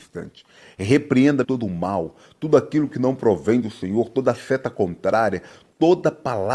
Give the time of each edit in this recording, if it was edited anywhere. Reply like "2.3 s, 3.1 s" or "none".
1.4 s